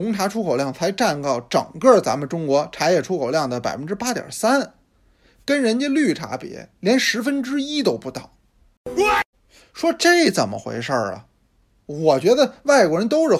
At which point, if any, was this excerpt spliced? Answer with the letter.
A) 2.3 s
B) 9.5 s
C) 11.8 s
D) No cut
D